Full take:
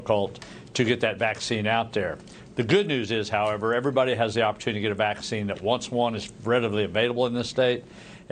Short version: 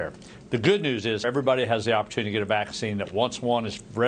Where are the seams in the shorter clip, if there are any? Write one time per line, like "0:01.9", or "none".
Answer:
0:01.2